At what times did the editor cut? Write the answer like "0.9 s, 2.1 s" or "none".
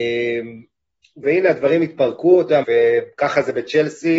1.2 s, 2.6 s